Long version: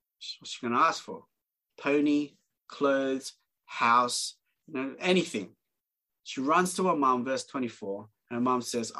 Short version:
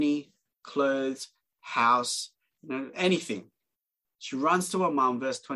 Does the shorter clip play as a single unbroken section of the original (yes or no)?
yes